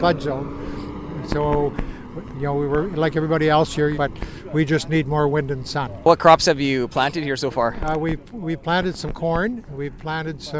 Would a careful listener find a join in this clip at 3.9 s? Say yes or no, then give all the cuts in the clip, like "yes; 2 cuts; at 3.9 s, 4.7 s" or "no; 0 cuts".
yes; 1 cut; at 3.9 s